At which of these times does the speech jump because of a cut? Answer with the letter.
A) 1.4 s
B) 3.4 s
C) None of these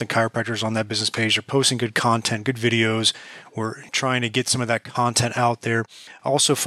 C